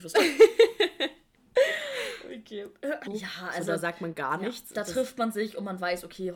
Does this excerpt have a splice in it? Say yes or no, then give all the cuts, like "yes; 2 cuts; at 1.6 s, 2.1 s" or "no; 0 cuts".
yes; 1 cut; at 3.1 s